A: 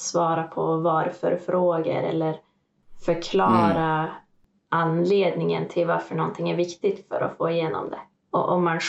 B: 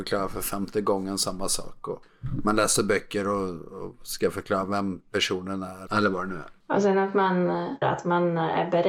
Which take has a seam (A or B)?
B